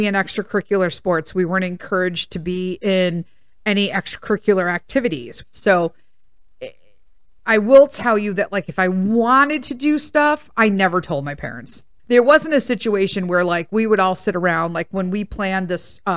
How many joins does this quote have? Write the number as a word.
two